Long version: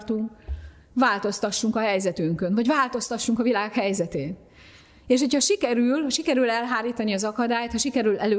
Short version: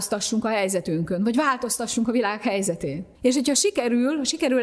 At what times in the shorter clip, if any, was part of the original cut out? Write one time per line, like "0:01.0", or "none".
0:03.1